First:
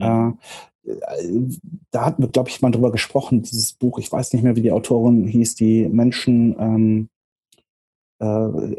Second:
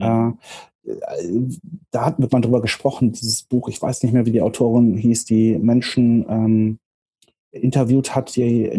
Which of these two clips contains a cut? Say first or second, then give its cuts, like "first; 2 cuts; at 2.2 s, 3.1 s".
second; 2 cuts; at 2.3 s, 7.5 s